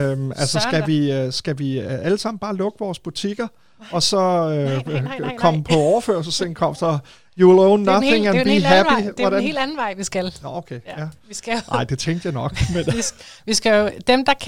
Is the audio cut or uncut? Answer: uncut